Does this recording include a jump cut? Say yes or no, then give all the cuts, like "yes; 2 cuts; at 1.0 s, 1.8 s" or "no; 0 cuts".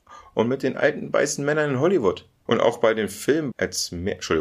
yes; 2 cuts; at 2.5 s, 3.5 s